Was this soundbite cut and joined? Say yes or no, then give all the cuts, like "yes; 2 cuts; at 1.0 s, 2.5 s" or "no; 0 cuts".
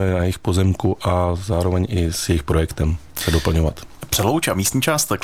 no; 0 cuts